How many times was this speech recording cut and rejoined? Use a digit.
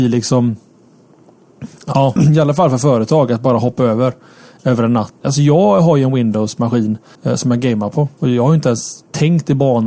3